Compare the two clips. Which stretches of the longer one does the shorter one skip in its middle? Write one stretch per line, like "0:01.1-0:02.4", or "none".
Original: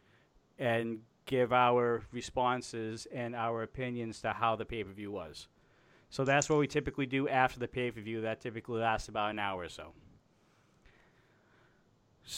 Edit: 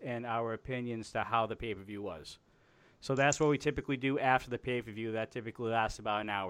none